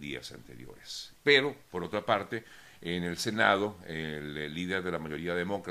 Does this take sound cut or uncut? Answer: cut